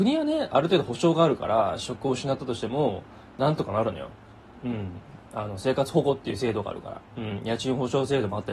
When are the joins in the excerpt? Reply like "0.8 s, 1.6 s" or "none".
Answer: 7.1 s